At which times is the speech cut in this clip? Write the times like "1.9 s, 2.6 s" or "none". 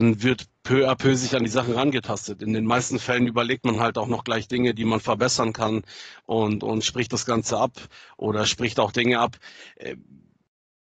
none